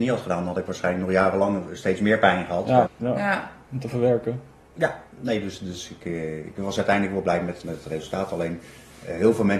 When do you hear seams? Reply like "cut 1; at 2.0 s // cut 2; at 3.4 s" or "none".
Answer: cut 1; at 2.9 s // cut 2; at 7.6 s